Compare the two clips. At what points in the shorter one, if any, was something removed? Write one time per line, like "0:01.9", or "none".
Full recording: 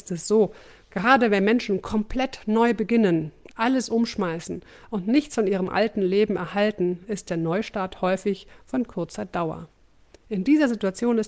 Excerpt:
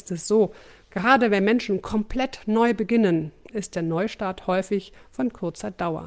0:03.5